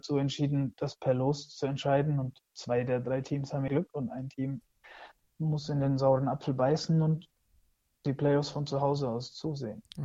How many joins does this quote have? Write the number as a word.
one